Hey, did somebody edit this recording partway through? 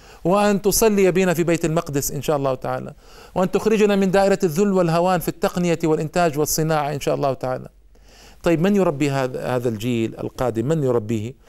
no; 0 cuts

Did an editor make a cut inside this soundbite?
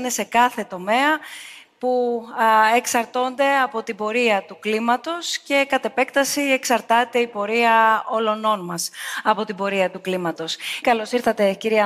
yes; 1 cut; at 10.8 s

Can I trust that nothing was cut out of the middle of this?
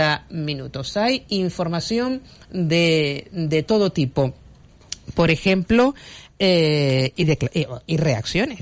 yes; 0 cuts

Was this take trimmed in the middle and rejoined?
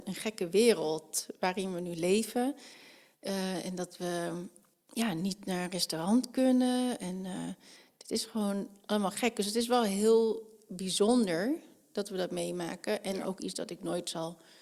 no; 0 cuts

